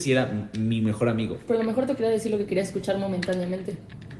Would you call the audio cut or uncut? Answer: uncut